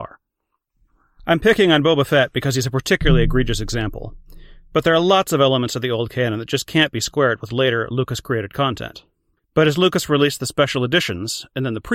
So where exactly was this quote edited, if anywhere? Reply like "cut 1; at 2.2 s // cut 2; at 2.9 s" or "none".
cut 1; at 9.4 s